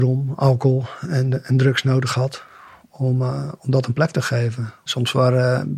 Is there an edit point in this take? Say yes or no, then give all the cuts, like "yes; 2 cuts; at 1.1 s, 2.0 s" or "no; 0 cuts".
yes; 1 cut; at 4.9 s